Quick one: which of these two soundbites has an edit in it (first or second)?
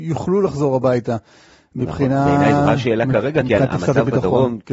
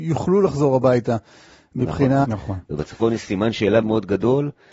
second